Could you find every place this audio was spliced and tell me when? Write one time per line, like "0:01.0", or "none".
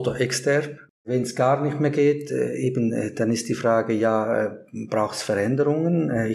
none